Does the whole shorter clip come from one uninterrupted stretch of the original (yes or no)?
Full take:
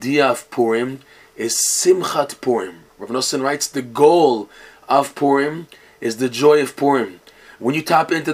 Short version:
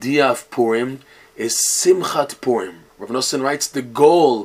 yes